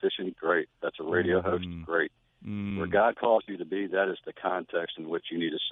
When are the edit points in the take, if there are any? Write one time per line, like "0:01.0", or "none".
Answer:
none